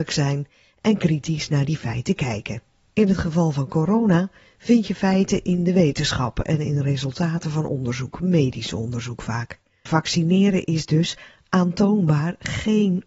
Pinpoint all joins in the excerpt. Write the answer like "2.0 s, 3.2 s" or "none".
9.9 s